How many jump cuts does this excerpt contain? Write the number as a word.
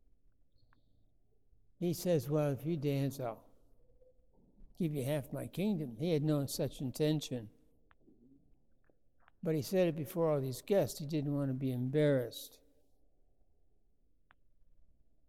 zero